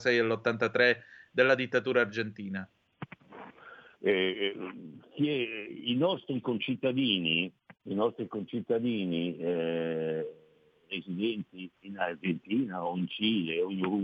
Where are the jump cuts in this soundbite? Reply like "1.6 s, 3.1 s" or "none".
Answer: 4.0 s, 11.8 s